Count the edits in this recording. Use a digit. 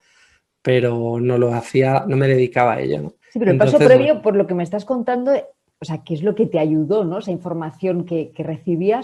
2